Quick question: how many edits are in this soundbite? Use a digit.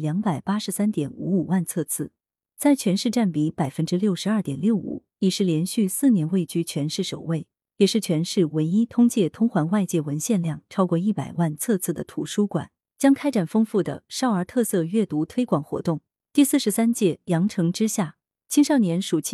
0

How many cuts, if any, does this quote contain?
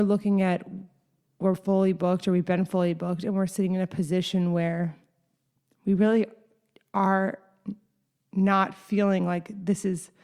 0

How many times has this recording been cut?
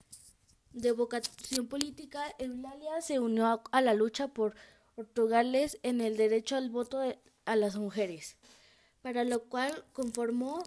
0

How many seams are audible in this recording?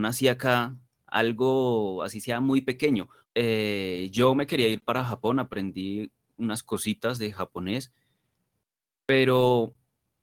2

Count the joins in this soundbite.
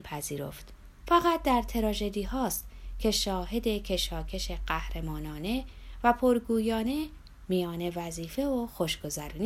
1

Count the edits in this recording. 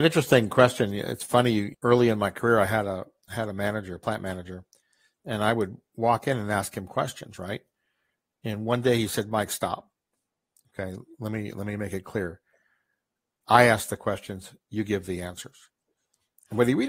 1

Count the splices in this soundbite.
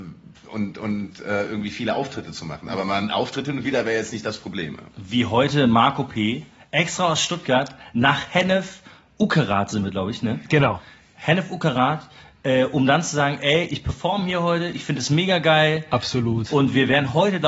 0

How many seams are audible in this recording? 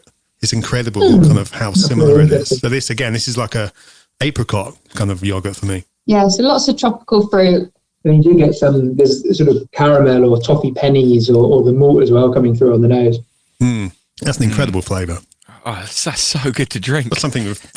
0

